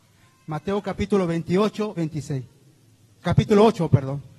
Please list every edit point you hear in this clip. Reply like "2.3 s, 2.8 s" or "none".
2.0 s

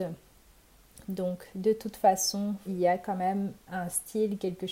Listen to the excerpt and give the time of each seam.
1.0 s, 2.7 s

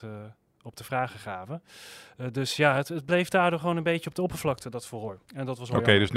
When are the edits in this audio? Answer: 5.2 s

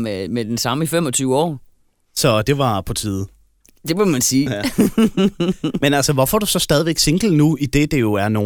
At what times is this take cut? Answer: none

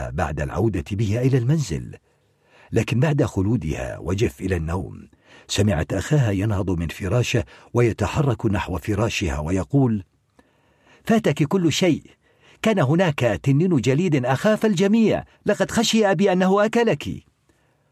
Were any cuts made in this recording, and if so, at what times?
15.3 s

